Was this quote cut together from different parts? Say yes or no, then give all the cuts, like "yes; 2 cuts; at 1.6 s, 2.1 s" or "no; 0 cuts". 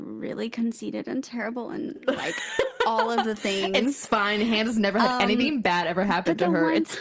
no; 0 cuts